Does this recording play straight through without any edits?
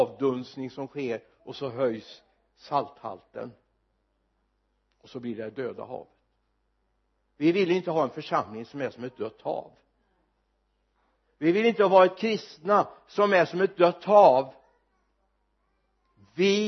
yes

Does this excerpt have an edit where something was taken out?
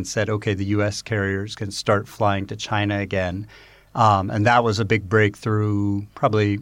no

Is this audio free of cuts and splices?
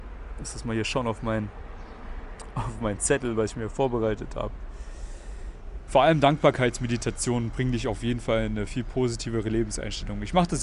no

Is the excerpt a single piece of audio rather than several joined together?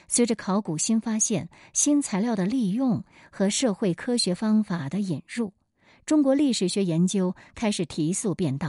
yes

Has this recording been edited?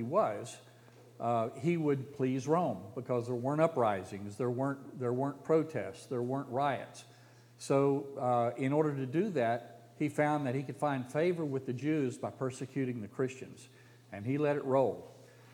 no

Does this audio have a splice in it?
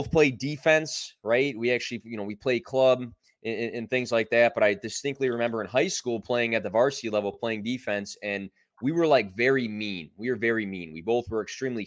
no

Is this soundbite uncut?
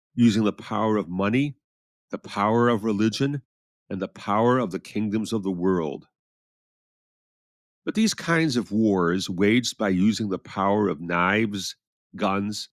yes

